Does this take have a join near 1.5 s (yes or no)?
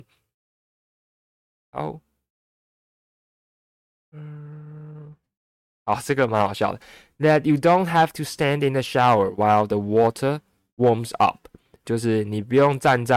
yes